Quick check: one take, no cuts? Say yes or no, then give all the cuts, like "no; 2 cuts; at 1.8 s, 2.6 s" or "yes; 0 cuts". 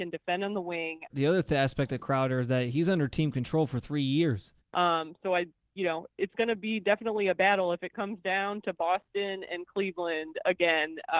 no; 2 cuts; at 1.1 s, 4.6 s